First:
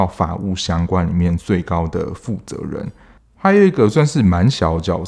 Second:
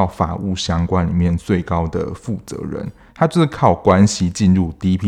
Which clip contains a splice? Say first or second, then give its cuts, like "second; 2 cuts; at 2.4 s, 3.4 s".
second; 1 cut; at 3.1 s